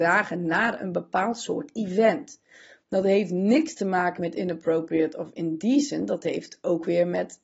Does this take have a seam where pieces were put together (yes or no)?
no